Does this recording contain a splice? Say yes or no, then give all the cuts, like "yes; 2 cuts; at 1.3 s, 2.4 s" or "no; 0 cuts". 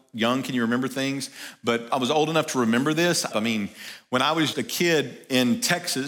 yes; 3 cuts; at 1.9 s, 3.3 s, 4.5 s